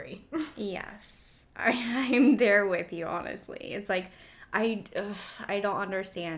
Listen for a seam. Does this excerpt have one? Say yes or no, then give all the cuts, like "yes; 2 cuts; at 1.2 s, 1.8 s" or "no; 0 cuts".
no; 0 cuts